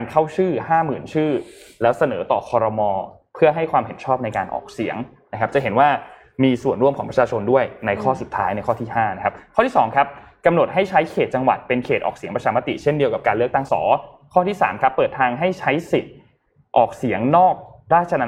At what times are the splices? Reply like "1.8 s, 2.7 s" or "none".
13.7 s